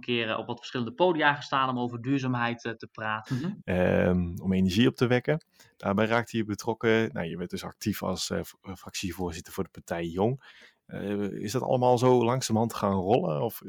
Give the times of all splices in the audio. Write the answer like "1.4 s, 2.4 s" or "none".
3.3 s